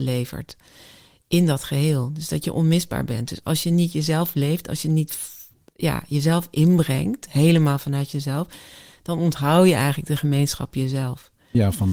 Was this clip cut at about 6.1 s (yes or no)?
no